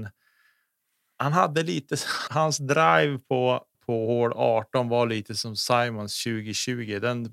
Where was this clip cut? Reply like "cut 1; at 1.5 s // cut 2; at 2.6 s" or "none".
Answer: cut 1; at 2.3 s // cut 2; at 3.7 s